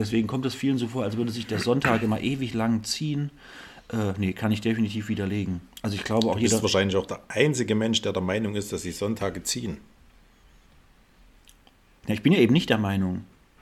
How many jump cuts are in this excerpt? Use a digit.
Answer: 0